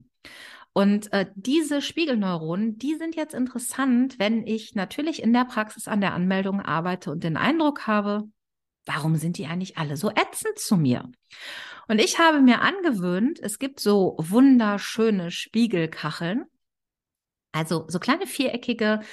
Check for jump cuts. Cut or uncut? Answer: uncut